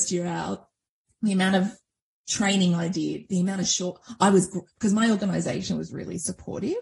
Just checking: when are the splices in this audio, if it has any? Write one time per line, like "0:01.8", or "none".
none